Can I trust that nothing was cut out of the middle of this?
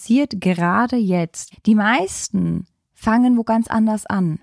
no; 1 cut; at 1.5 s

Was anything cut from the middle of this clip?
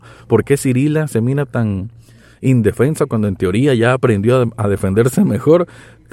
no; 0 cuts

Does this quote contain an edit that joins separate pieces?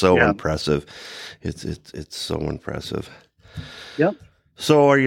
no; 0 cuts

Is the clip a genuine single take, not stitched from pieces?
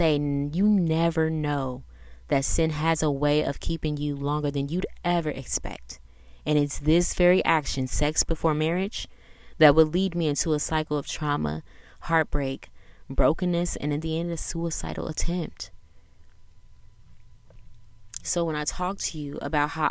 yes; 0 cuts

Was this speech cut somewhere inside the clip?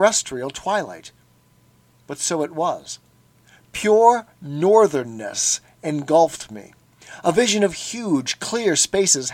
no; 0 cuts

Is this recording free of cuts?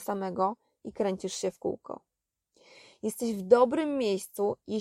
yes; 0 cuts

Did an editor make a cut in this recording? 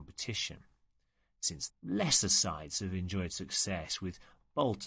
yes; 1 cut; at 1.7 s

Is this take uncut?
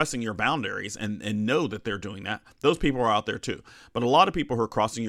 yes; 0 cuts

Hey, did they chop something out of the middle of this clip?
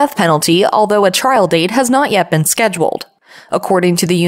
no; 0 cuts

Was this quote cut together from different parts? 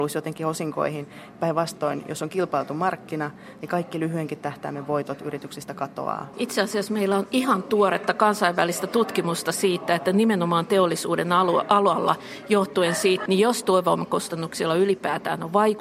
yes; 2 cuts; at 6.3 s, 13.3 s

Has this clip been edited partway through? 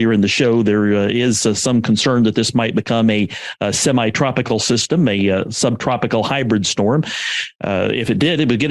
no; 0 cuts

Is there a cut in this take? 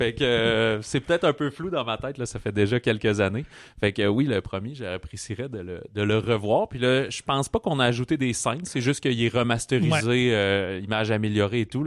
no; 0 cuts

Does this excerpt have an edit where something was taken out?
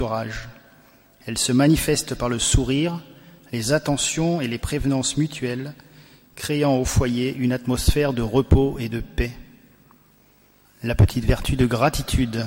yes; 1 cut; at 10.6 s

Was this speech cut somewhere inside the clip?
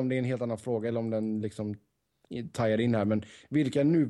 yes; 1 cut; at 2.2 s

